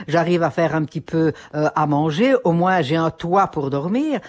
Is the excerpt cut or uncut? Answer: uncut